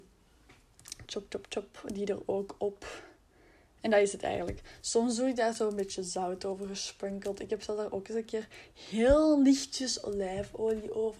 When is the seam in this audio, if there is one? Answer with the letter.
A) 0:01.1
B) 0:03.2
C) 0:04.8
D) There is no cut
A